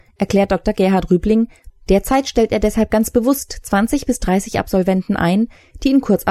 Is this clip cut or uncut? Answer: cut